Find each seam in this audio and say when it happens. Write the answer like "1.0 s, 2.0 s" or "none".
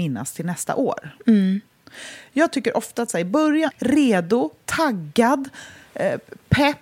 1.2 s, 3.7 s